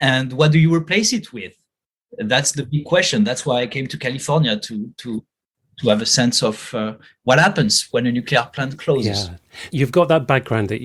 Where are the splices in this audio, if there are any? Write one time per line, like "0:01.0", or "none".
none